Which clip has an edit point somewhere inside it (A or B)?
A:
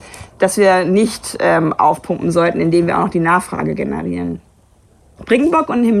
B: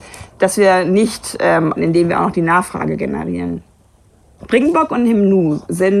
B